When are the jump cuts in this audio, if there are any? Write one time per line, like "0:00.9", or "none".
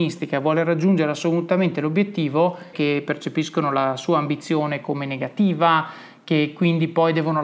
0:02.7

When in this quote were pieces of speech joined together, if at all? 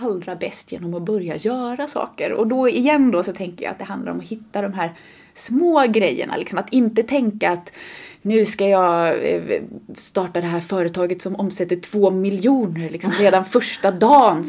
none

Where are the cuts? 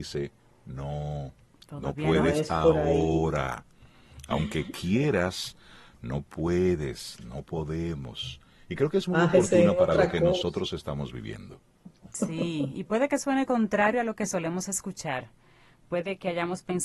none

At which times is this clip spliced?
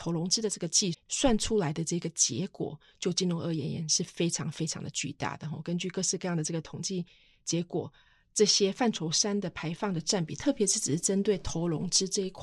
0:00.9

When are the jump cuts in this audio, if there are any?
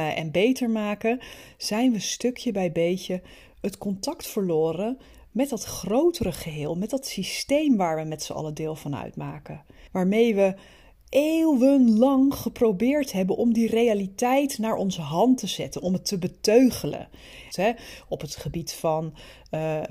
0:09.9
0:17.5

